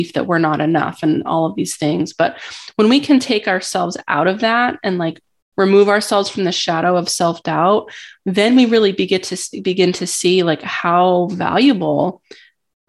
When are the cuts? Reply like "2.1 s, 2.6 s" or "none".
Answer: none